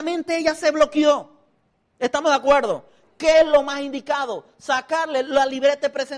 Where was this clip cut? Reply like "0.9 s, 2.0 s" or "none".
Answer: none